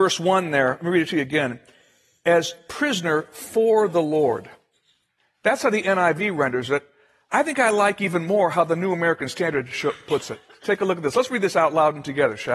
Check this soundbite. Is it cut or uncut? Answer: uncut